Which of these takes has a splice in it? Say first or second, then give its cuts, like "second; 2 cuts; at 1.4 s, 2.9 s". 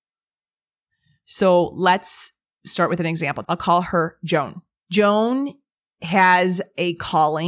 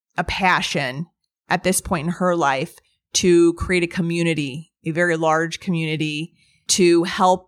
first; 1 cut; at 3.4 s